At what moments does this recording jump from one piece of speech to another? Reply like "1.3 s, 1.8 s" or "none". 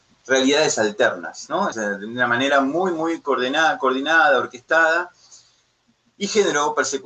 1.7 s